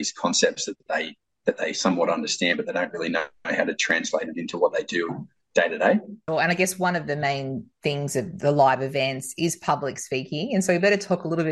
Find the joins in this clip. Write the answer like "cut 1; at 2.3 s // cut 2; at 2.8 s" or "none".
none